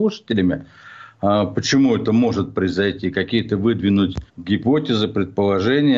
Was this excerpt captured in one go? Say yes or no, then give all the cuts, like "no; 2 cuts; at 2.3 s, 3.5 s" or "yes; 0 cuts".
no; 1 cut; at 4.3 s